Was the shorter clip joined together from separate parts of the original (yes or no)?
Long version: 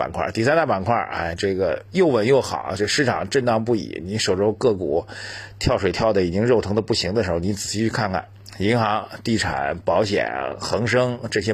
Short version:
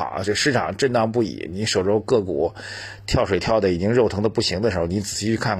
no